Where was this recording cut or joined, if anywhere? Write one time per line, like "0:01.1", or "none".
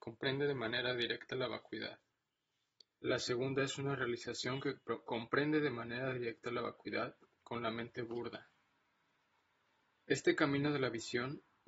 0:03.0